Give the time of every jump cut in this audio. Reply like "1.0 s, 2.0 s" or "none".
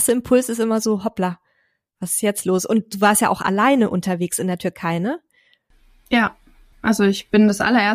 6.7 s